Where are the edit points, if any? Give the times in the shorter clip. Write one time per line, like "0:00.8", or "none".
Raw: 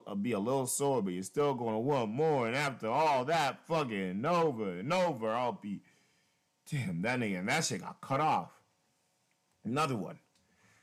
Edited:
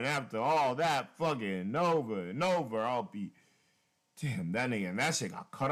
none